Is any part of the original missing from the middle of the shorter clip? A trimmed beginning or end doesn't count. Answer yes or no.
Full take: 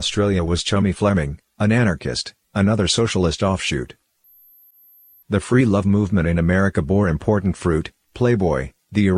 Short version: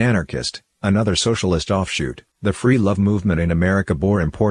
yes